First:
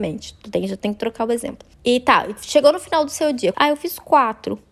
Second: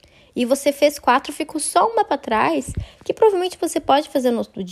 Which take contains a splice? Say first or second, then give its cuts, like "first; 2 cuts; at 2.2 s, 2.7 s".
first; 2 cuts; at 1.7 s, 3.5 s